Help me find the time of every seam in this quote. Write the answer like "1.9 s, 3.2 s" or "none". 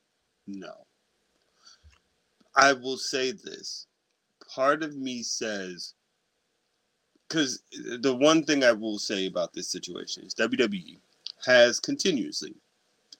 none